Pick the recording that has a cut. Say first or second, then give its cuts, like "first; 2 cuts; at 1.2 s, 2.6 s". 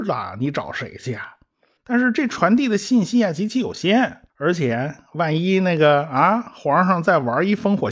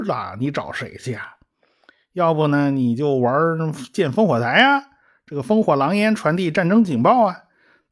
first; 2 cuts; at 1.8 s, 4.3 s